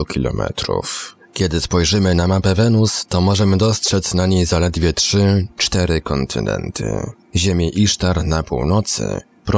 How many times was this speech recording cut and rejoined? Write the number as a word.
zero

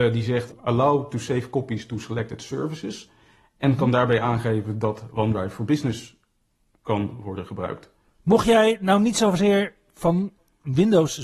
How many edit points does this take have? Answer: one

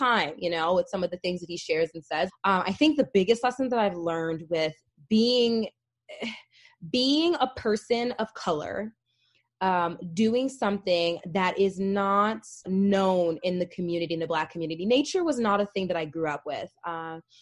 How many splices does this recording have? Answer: two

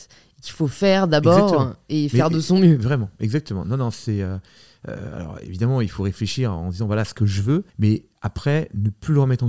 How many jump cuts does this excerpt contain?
one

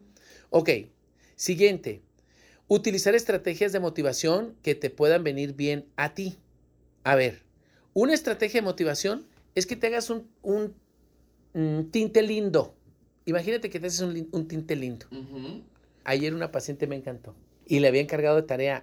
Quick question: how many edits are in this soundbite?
two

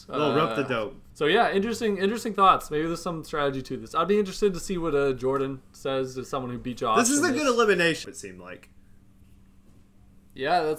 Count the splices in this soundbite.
two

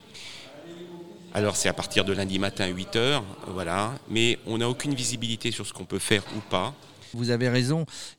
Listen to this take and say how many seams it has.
one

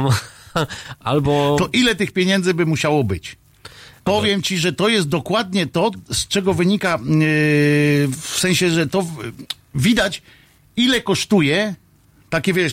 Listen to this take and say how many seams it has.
one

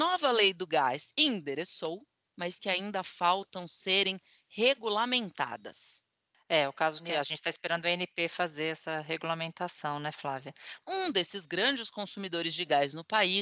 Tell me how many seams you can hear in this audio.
one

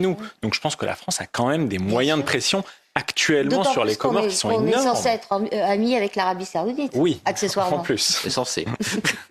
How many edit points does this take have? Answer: zero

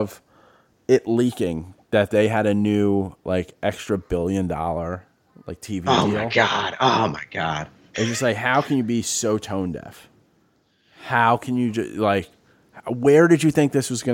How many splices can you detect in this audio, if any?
zero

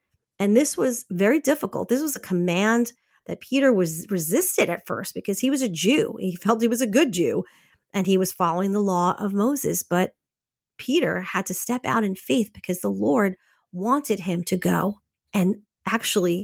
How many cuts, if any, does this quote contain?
zero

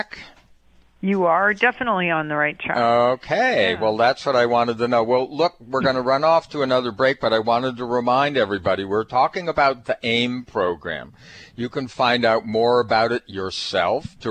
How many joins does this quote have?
zero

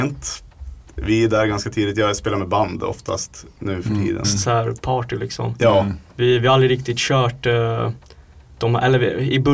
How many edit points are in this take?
two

